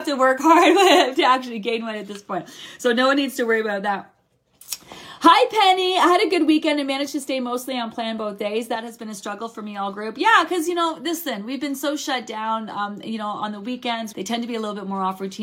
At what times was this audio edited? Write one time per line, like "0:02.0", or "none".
0:14.1